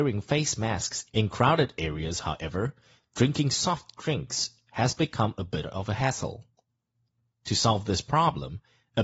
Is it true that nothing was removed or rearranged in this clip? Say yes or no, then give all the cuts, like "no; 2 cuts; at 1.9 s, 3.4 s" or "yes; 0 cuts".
yes; 0 cuts